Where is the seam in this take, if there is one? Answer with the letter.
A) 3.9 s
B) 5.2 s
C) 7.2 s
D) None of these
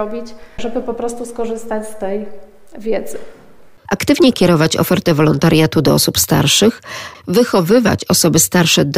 A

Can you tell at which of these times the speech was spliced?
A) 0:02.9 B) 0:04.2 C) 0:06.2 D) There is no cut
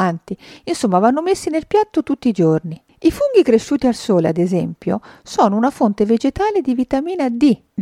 D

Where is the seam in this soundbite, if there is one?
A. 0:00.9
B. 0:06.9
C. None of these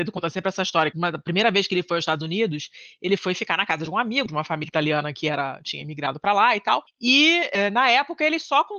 A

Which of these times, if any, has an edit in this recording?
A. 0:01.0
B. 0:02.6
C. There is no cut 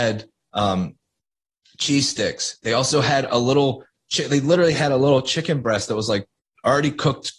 C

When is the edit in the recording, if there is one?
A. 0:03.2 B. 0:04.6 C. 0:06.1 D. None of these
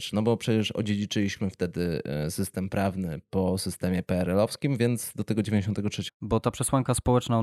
C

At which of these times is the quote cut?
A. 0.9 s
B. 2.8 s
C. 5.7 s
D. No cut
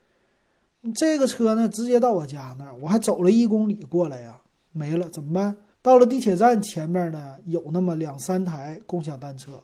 C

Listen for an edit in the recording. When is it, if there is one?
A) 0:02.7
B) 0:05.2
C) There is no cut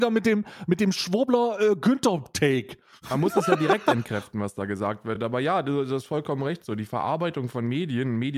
C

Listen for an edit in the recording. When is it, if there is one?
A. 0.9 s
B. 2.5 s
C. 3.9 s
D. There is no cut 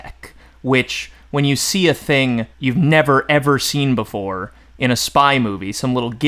B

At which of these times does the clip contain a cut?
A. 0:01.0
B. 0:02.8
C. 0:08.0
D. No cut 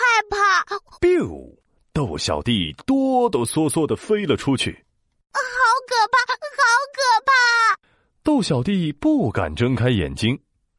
A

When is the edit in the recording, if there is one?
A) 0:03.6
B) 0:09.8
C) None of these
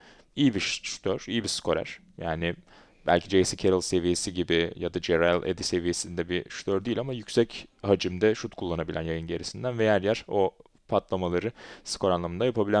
C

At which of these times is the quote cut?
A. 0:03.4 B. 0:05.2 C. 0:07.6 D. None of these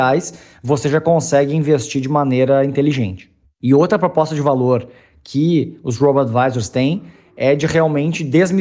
D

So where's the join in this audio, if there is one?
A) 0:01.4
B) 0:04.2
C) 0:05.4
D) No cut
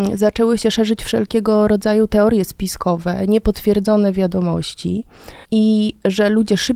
C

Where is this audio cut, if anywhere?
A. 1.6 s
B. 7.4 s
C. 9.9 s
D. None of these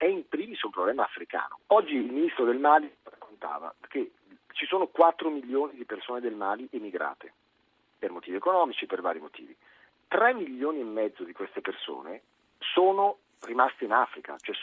A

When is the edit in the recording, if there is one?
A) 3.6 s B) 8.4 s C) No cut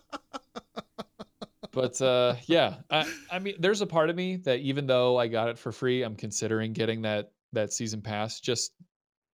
C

